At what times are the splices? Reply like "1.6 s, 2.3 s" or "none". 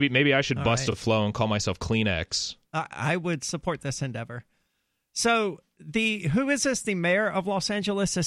none